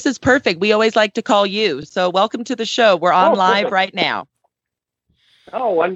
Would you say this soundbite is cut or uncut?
uncut